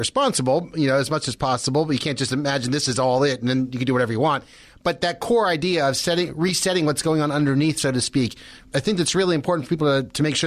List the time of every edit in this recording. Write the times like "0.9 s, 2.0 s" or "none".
none